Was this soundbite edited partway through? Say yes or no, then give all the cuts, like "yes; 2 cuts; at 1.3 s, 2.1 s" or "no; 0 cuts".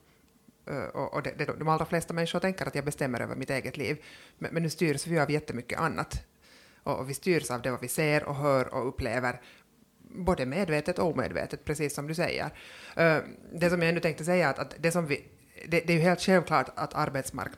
yes; 1 cut; at 1.5 s